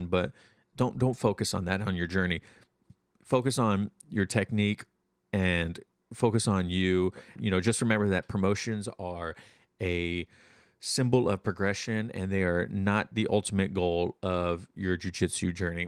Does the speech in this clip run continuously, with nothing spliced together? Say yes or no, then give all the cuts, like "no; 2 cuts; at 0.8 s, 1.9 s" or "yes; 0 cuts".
no; 1 cut; at 7.4 s